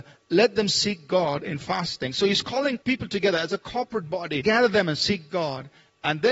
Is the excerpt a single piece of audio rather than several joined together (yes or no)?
no